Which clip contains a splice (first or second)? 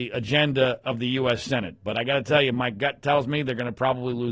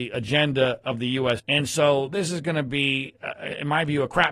second